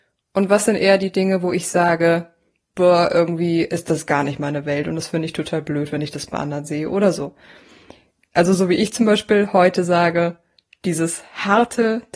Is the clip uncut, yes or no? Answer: no